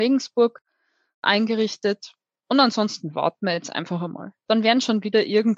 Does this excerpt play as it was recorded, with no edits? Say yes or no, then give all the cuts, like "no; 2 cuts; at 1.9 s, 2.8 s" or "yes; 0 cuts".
yes; 0 cuts